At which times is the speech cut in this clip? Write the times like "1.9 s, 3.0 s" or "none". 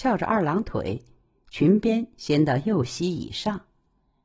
none